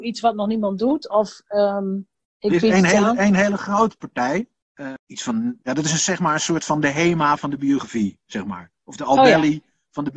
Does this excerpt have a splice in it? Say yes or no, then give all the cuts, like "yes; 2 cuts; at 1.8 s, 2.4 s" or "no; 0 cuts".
no; 0 cuts